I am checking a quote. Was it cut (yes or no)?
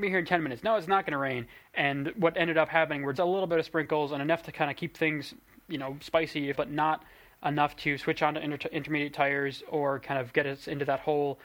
yes